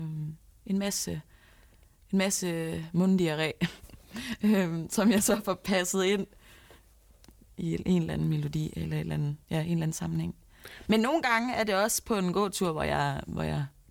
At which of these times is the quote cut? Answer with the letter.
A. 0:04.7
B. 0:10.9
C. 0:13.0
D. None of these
B